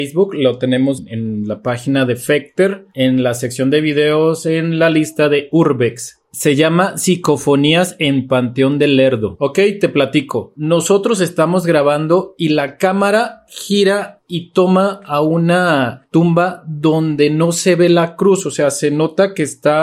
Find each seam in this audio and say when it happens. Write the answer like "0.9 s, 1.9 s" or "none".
none